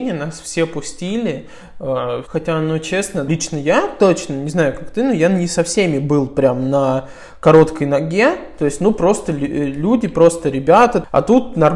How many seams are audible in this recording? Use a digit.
1